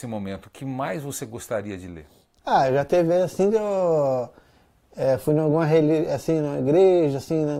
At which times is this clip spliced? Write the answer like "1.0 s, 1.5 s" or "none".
none